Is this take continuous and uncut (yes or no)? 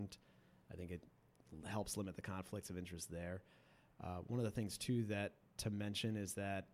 yes